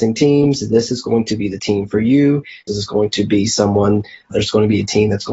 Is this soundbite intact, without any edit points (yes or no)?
no